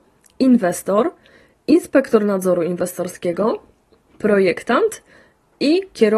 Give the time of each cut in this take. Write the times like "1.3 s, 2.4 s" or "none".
none